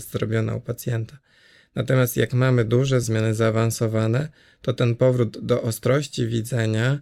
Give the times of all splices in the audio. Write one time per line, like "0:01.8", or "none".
0:03.0